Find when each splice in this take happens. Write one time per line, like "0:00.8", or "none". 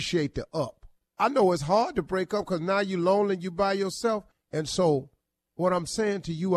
0:01.0
0:04.3